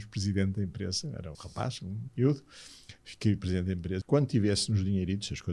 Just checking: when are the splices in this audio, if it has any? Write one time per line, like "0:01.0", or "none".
0:01.3
0:04.0